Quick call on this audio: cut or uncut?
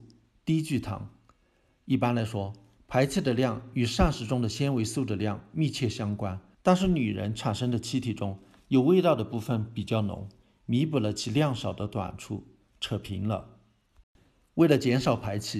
cut